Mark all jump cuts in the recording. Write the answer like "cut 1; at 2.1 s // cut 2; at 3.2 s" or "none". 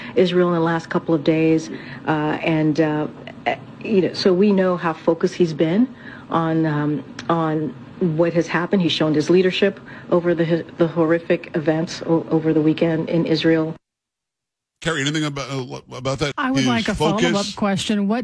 cut 1; at 16.3 s